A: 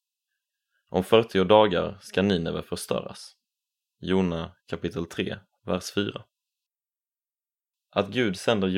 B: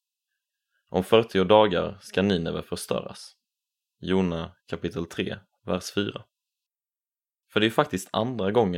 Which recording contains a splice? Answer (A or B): B